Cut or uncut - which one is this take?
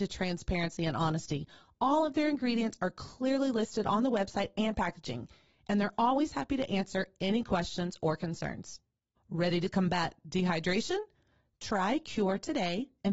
uncut